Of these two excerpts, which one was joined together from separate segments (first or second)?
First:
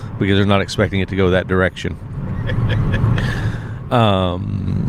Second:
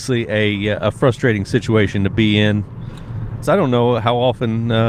second